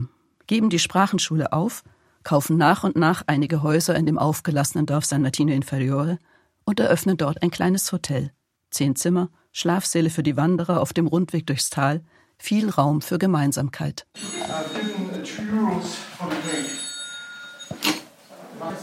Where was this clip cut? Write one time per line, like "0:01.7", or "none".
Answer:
none